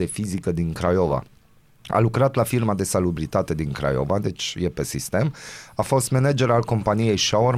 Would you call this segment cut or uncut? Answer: uncut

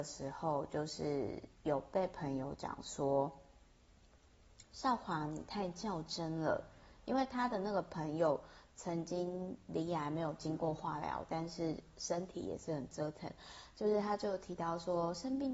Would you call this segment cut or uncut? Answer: uncut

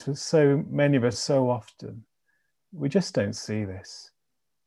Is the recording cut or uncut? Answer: uncut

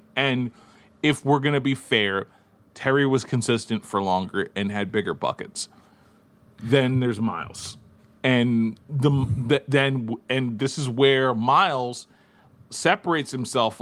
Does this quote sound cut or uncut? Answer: uncut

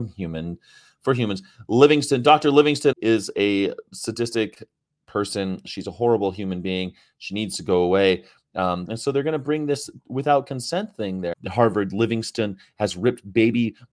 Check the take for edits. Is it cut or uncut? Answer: cut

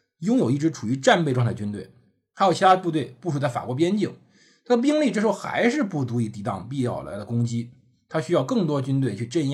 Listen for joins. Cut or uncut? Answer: uncut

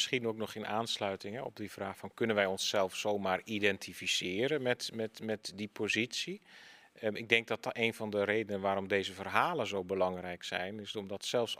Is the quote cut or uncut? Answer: uncut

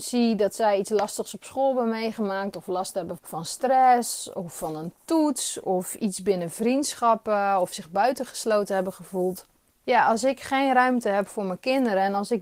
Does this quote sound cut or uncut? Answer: cut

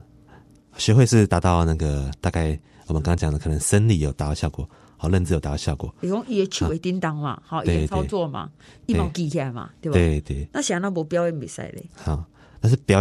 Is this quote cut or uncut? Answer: uncut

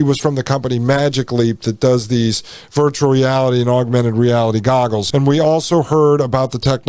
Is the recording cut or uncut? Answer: cut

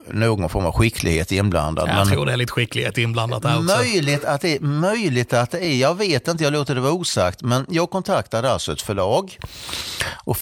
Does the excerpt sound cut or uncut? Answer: uncut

